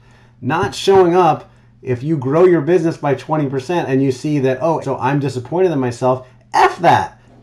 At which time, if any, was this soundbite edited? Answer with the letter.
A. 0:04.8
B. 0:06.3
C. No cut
A